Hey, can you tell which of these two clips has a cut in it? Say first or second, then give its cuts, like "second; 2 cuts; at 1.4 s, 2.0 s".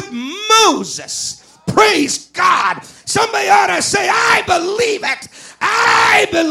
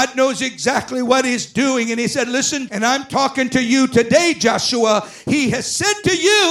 second; 1 cut; at 2.7 s